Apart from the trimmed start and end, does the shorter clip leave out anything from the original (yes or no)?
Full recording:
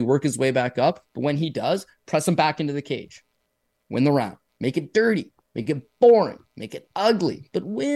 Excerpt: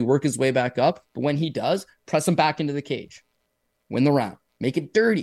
no